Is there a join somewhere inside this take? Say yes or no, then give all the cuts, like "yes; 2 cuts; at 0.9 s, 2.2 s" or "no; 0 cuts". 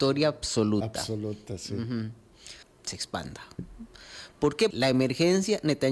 yes; 2 cuts; at 2.6 s, 4.7 s